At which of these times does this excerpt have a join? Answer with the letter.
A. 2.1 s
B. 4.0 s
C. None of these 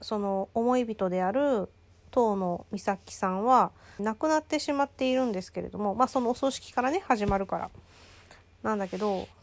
B